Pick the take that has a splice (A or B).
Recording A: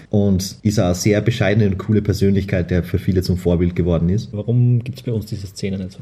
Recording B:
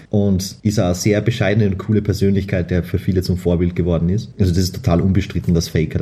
A